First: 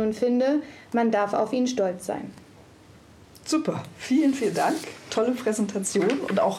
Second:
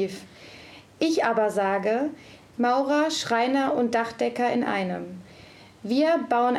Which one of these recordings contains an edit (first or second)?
second